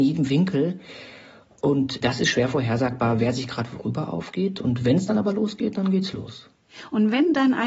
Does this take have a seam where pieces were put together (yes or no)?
no